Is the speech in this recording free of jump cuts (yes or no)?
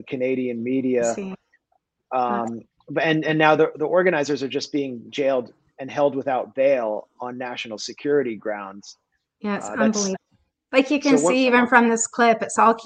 yes